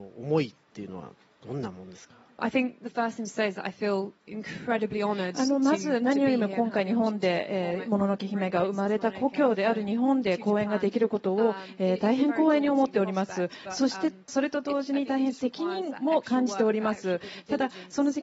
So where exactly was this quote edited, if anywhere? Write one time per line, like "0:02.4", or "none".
0:02.4